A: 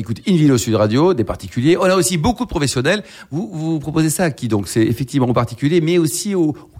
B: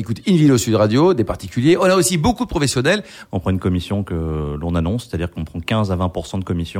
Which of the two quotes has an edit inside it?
B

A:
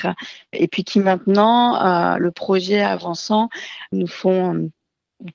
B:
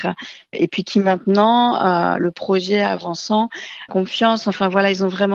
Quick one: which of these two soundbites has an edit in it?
B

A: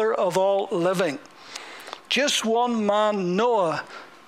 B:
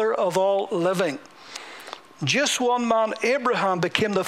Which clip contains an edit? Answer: B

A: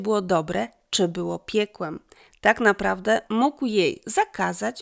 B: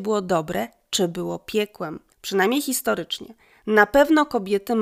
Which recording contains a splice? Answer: B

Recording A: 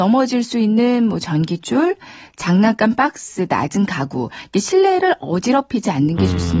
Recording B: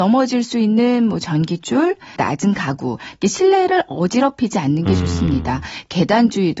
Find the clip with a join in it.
B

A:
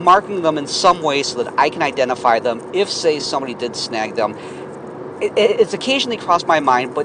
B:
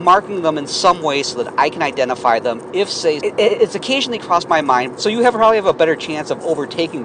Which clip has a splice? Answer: B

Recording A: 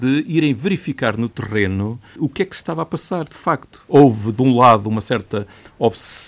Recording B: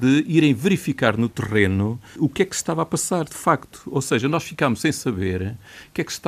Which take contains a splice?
A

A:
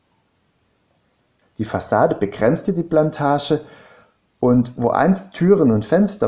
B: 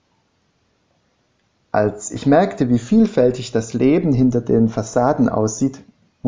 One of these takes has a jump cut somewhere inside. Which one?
A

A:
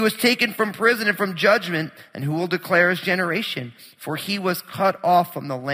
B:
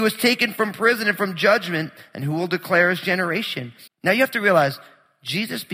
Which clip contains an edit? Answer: B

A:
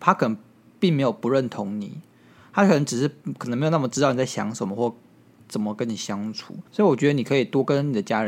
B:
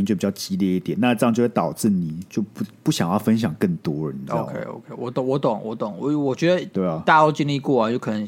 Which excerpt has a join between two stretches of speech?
A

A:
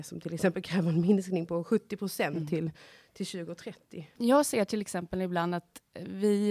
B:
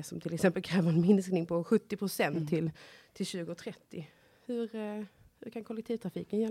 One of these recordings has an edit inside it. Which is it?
A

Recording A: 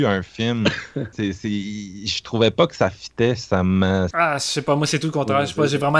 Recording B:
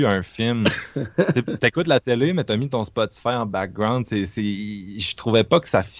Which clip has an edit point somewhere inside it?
A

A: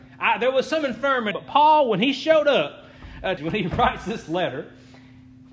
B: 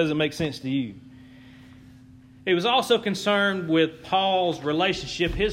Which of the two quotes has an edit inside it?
A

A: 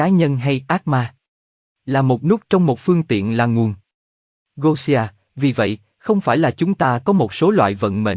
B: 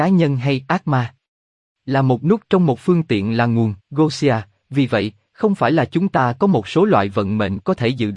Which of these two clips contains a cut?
B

